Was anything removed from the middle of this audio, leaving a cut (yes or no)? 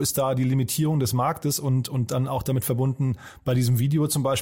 no